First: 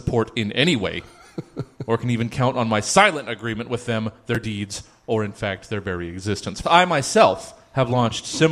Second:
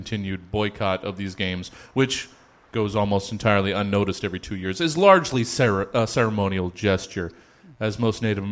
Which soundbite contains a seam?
first; 1 cut; at 6.6 s

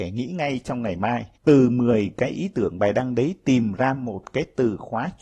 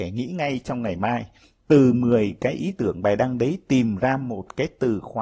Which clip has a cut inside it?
first; 1 cut; at 1.4 s

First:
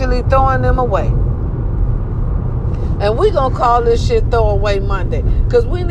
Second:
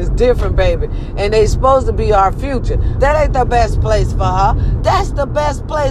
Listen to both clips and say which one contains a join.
second; 2 cuts; at 3.0 s, 4.8 s

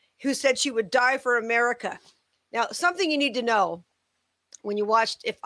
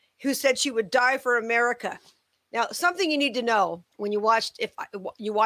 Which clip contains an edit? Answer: second; 1 cut; at 3.9 s

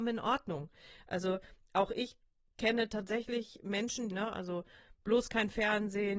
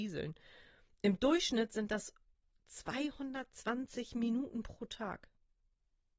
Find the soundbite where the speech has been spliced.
first; 1 cut; at 4.1 s

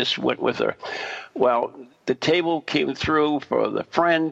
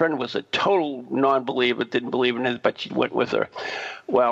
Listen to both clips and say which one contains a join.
second; 1 cut; at 2.9 s

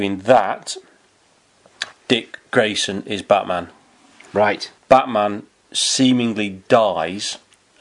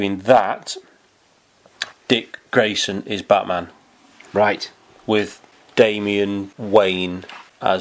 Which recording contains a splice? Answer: first; 1 cut; at 4.8 s

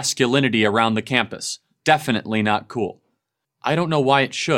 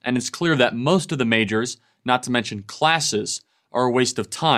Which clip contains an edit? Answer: first; 1 cut; at 3.4 s

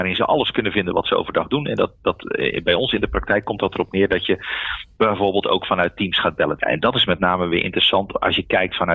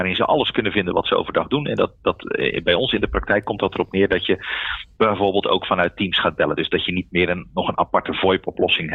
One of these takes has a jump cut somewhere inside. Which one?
first; 1 cut; at 6.6 s

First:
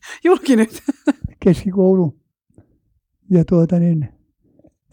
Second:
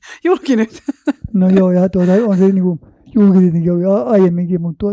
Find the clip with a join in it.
first; 1 cut; at 1.3 s

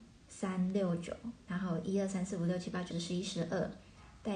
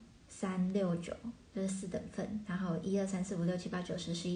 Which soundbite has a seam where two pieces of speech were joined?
first; 2 cuts; at 1.5 s, 2.9 s

